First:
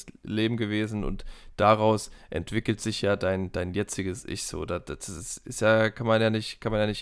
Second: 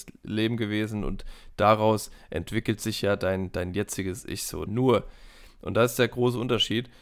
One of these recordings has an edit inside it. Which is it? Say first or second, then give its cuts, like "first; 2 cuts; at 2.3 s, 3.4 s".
second; 1 cut; at 4.7 s